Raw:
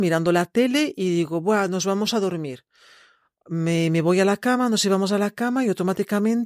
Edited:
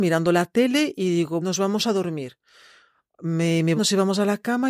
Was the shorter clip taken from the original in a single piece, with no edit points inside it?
no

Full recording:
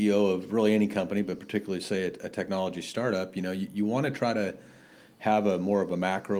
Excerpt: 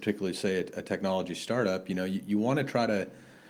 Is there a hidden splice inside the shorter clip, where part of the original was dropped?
no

